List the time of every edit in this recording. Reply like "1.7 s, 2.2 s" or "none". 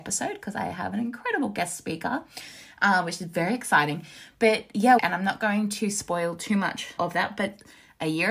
5.0 s, 7.0 s